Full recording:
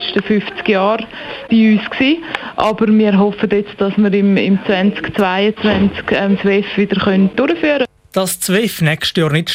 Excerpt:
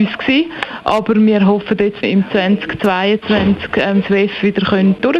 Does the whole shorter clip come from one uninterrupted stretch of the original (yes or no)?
no